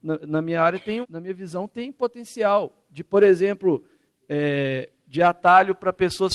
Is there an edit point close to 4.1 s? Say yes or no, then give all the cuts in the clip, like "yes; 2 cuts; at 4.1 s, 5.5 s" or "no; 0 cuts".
yes; 2 cuts; at 1.0 s, 4.1 s